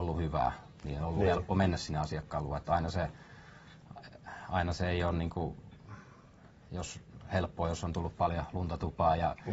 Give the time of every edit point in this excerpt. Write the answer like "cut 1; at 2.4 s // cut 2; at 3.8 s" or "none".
none